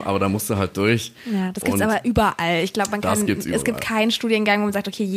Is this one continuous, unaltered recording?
yes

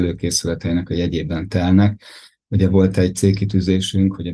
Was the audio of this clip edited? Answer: no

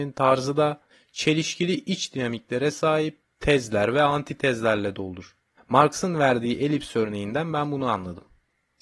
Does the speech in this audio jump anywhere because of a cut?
no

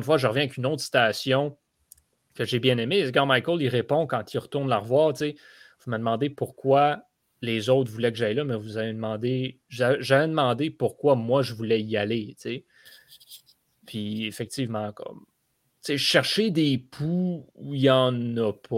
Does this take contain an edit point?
no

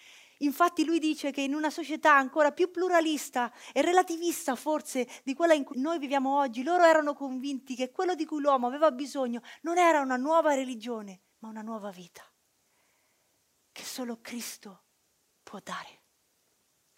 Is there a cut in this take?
yes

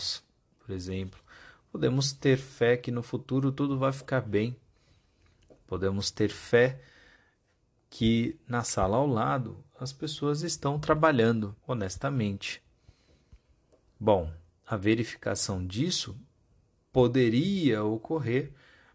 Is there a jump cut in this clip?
yes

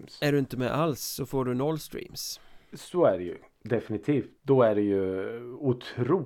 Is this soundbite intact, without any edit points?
no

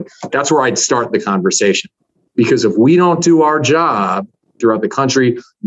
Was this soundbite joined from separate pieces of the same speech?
yes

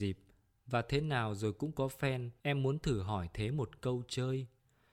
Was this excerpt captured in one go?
no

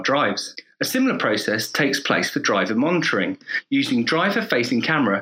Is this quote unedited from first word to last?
yes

